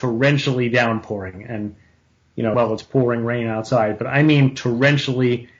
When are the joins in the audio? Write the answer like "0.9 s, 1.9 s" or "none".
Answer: 2.5 s